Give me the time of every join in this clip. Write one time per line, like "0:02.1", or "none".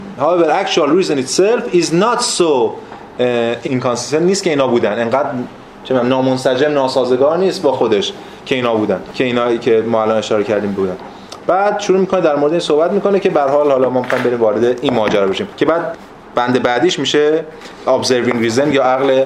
0:03.7